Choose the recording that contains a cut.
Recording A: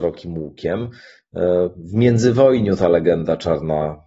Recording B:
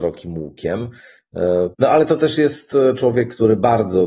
B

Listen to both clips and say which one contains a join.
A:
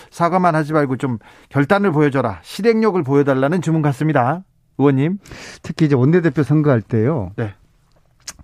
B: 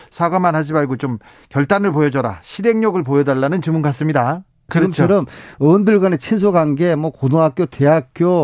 B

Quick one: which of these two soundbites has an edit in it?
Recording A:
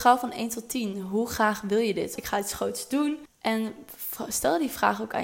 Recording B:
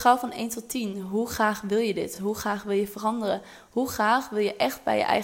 A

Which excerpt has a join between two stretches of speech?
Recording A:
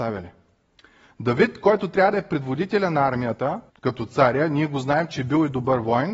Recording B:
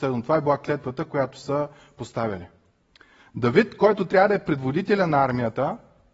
A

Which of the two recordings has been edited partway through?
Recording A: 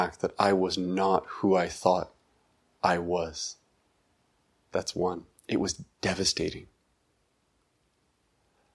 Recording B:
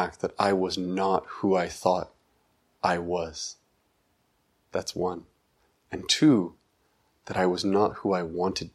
A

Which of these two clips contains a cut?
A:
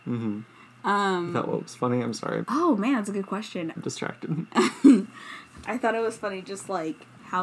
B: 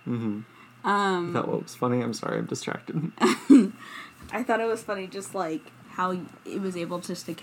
A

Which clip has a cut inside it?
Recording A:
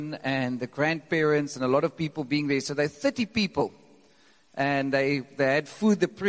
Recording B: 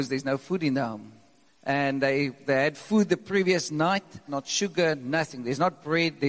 B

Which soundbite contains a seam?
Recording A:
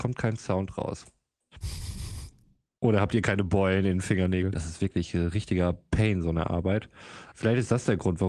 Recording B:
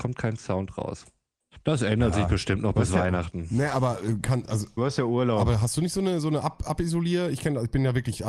A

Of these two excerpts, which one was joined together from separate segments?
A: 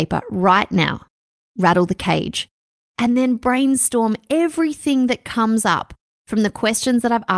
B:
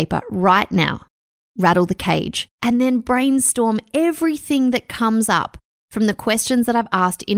B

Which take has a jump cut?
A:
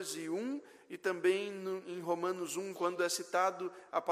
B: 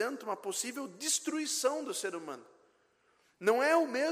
A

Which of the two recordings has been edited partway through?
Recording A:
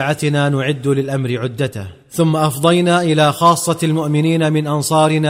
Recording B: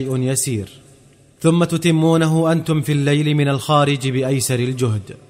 A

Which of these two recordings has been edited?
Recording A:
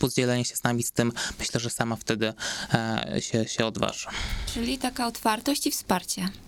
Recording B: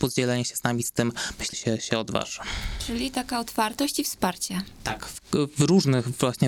B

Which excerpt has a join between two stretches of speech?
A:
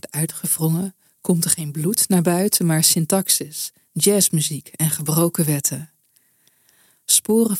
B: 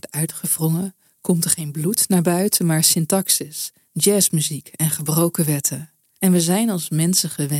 B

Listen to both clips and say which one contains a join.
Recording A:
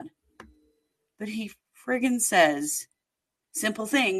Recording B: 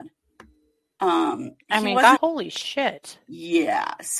B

